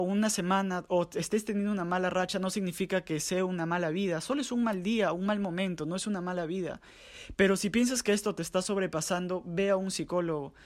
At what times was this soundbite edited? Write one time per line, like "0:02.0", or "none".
none